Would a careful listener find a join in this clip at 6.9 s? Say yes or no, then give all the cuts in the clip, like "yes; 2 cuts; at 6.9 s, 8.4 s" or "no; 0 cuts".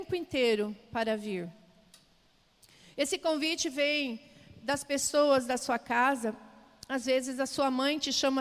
no; 0 cuts